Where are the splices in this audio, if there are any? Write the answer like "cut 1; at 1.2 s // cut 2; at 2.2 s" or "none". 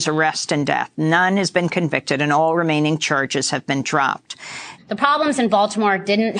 cut 1; at 4.8 s

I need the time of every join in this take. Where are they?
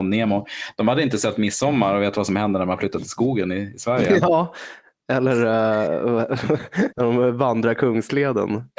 cut 1; at 6.9 s

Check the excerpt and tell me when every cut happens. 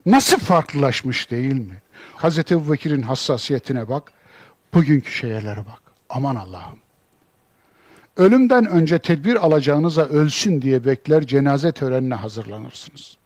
cut 1; at 2.2 s

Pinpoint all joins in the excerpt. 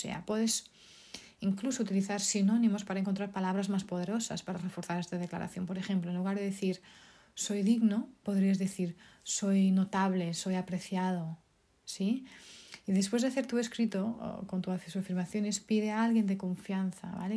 none

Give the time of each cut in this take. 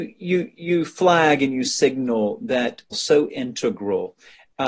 cut 1; at 2.9 s

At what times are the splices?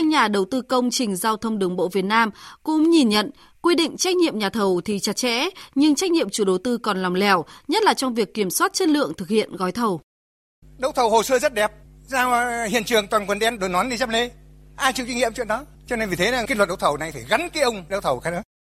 cut 1; at 10.6 s

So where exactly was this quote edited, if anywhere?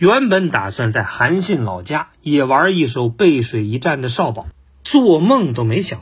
none

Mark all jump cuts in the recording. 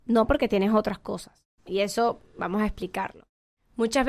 cut 1; at 1.6 s

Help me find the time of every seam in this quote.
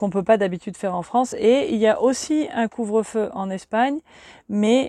none

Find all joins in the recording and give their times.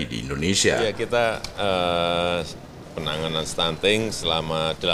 cut 1; at 2.8 s

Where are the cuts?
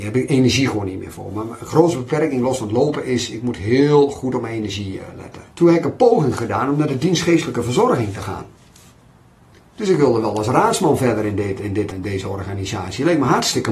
cut 1; at 5.5 s // cut 2; at 11.9 s

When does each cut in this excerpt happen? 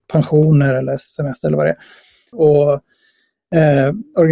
cut 1; at 2.3 s

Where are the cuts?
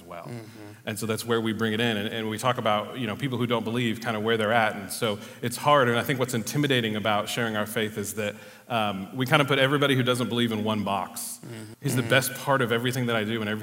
cut 1; at 11.7 s

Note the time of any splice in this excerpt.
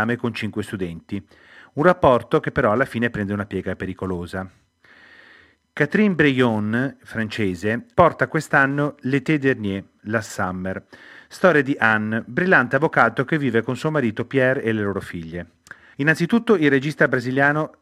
cut 1; at 7.9 s // cut 2; at 15.9 s

